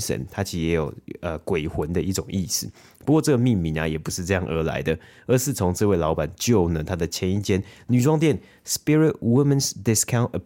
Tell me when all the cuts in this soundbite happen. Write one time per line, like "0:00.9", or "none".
none